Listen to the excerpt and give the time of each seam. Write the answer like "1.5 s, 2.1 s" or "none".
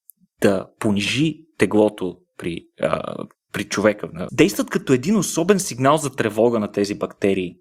4.3 s